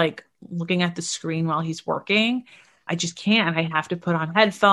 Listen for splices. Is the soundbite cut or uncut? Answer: cut